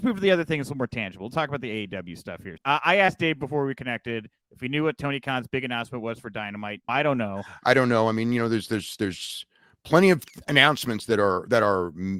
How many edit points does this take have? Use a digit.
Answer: 2